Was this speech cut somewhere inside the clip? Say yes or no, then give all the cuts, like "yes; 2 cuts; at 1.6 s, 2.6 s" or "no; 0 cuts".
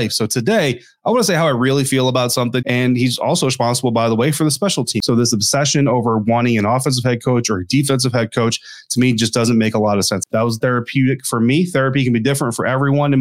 yes; 1 cut; at 2.6 s